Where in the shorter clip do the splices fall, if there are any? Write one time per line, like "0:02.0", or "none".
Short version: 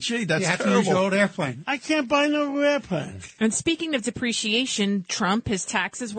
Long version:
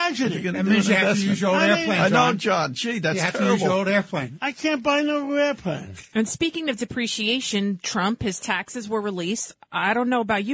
none